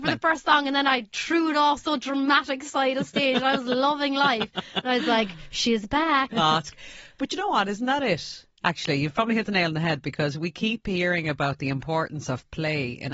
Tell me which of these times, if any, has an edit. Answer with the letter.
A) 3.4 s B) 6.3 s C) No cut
B